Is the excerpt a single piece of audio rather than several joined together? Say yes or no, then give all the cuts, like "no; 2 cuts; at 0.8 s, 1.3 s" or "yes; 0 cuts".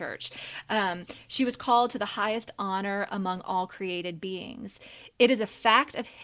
yes; 0 cuts